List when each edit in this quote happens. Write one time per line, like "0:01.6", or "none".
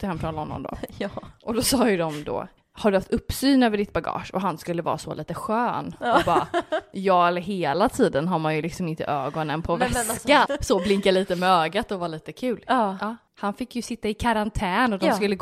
0:10.4